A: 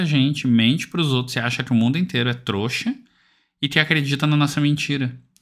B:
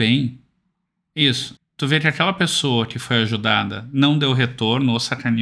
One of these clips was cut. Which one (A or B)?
B